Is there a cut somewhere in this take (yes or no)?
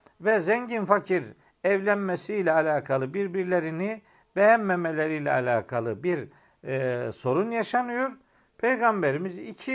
no